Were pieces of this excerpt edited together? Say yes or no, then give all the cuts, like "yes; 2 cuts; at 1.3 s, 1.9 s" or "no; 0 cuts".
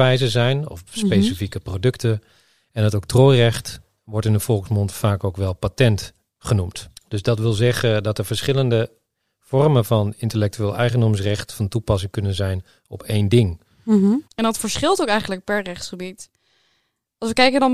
yes; 2 cuts; at 6.9 s, 14.2 s